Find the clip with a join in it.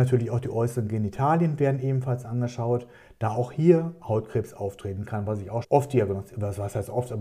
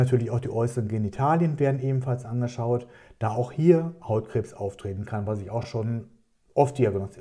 first; 1 cut; at 5.6 s

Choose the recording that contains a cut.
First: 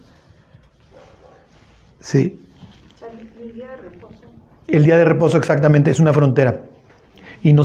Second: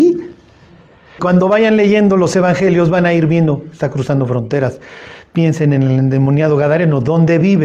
second; 1 cut; at 1.2 s

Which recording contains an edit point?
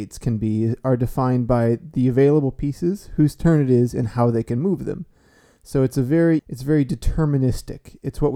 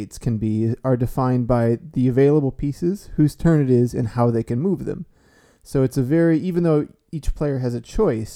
first; 1 cut; at 6.4 s

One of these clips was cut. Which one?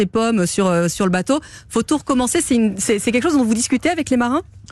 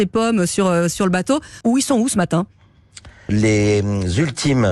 second; 2 cuts; at 1.6 s, 3.3 s

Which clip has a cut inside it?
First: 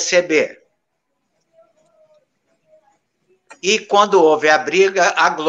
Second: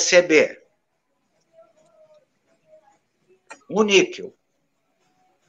second; 1 cut; at 3.6 s

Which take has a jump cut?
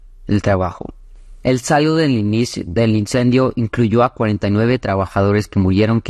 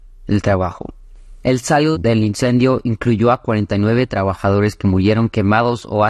second; 1 cut; at 1.9 s

